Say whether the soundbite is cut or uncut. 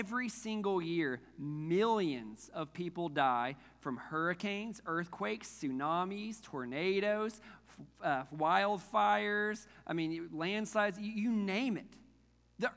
uncut